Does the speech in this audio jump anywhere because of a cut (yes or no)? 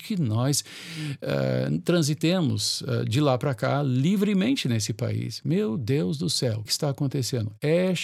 yes